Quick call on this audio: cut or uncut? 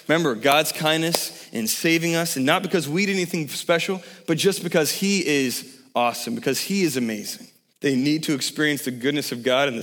cut